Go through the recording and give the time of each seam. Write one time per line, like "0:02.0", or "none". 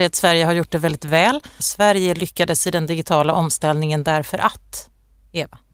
0:01.6

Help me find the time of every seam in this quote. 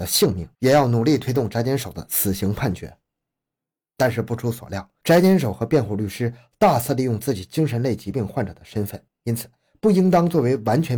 0:05.0
0:09.1

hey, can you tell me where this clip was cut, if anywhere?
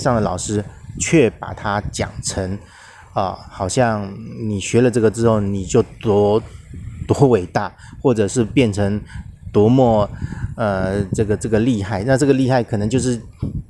none

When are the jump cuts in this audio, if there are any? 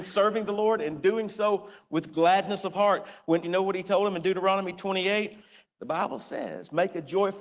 0:03.4
0:05.6

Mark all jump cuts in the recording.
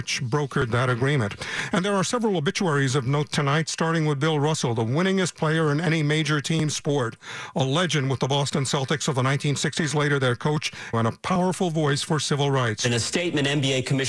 0:10.9

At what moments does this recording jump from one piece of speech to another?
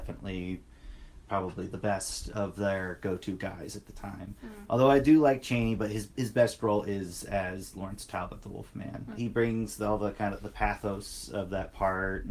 0:09.1

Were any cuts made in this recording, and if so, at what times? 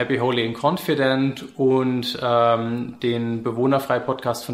none

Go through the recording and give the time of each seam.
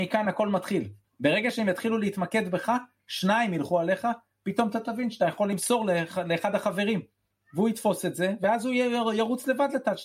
0:01.0
0:07.3

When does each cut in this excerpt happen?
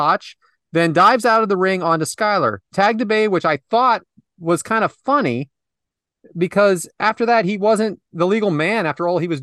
none

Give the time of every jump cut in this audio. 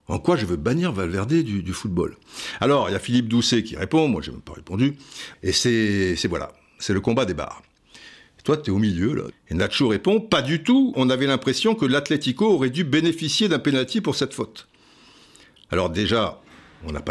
0:05.3
0:09.3
0:10.9

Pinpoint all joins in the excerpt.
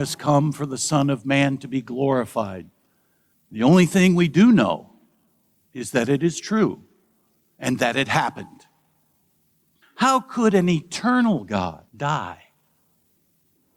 0:03.3
0:09.8
0:11.9

